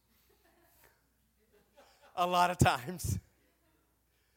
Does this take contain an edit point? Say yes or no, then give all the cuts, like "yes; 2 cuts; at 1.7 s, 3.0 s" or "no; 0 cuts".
no; 0 cuts